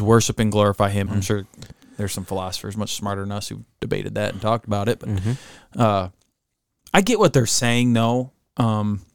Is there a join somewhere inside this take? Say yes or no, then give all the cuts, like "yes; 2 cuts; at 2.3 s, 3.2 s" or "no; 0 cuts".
yes; 1 cut; at 1.1 s